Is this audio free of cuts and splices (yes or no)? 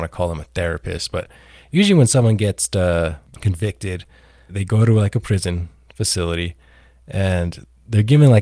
no